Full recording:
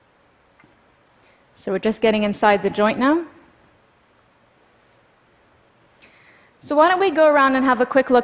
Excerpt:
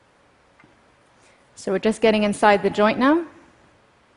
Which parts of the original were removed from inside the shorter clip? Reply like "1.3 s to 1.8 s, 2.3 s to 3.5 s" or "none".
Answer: none